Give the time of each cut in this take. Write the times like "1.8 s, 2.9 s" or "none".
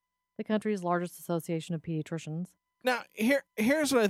2.7 s

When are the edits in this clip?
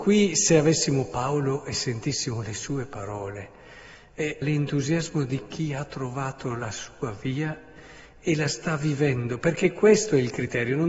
4.4 s

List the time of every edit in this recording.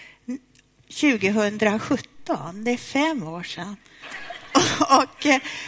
4.0 s

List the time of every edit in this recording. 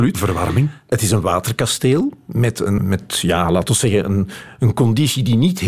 2.8 s

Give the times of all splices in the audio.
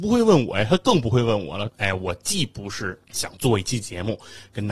1.7 s

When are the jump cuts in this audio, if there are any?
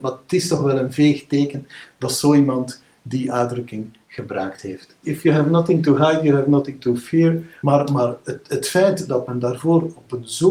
5.0 s, 7.6 s

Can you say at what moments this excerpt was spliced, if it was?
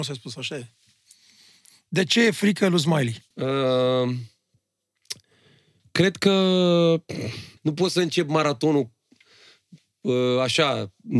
3.3 s, 7.6 s

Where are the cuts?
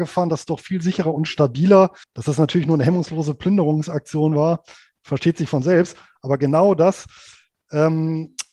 2.0 s

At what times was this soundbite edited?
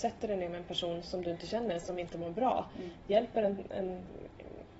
none

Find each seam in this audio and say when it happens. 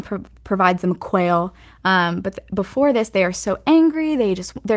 none

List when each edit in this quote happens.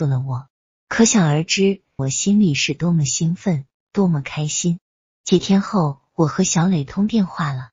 2.0 s

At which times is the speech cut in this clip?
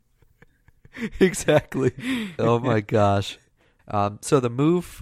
2.4 s, 3.8 s

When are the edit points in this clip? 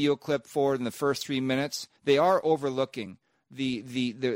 2.0 s

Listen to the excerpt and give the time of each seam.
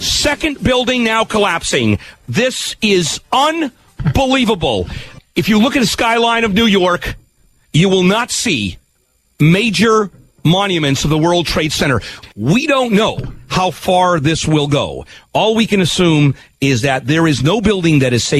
none

